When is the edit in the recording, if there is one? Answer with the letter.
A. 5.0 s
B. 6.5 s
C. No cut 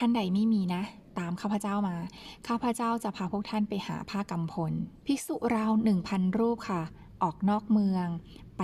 A